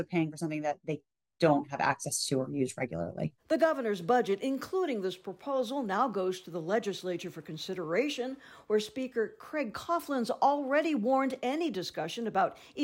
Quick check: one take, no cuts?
yes; 0 cuts

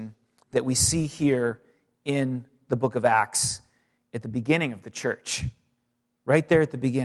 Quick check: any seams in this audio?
no; 0 cuts

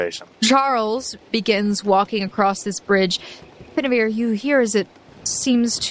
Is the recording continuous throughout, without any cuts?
no; 1 cut; at 1.2 s

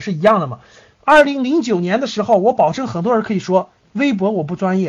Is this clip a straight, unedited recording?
yes; 0 cuts

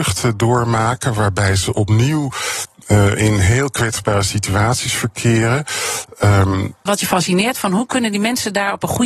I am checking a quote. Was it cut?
yes; 1 cut; at 6.9 s

